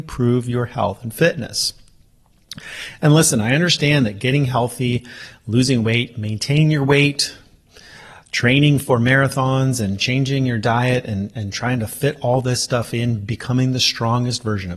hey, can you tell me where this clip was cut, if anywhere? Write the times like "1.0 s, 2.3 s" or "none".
none